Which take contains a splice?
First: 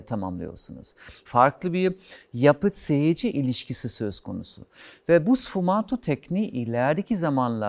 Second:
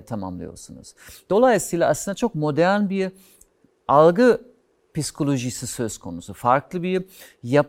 first; 1 cut; at 1.3 s

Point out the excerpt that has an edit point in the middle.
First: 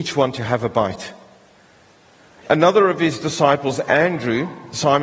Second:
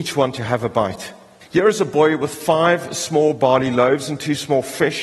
second; 1 cut; at 1.4 s

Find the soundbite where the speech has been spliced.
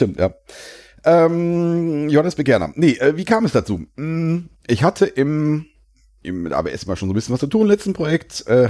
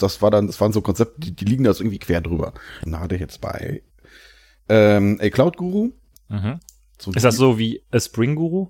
second; 1 cut; at 2.9 s

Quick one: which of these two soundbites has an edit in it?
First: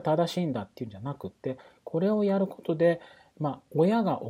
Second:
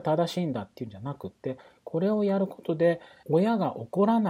second; 1 cut; at 3.2 s

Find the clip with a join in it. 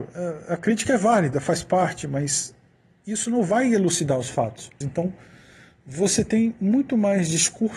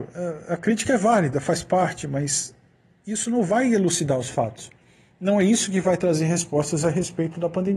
first; 1 cut; at 4.8 s

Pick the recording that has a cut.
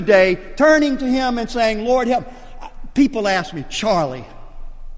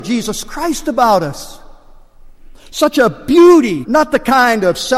second; 1 cut; at 3.8 s

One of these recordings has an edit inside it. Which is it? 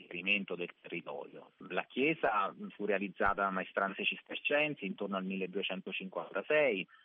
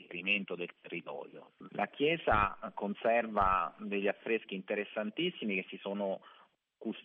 second; 1 cut; at 1.7 s

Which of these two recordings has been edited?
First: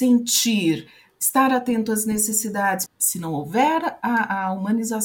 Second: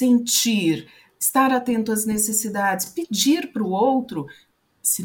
first; 1 cut; at 2.9 s

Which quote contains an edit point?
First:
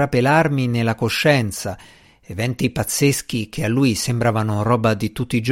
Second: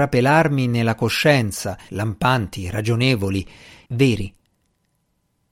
second; 2 cuts; at 1.9 s, 3.9 s

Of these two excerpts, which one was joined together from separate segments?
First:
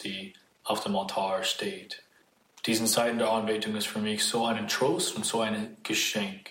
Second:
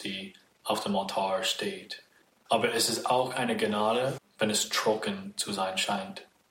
second; 2 cuts; at 2.5 s, 4.2 s

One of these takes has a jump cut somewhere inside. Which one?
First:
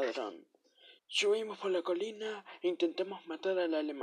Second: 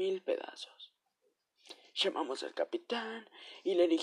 first; 1 cut; at 1.0 s

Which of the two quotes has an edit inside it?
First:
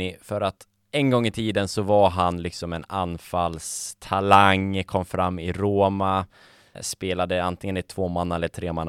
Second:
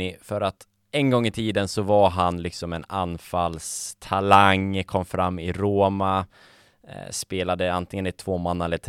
first; 1 cut; at 6.7 s

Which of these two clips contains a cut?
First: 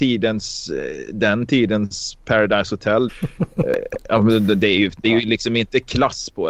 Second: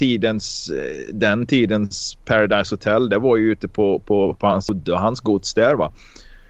first; 1 cut; at 3.1 s

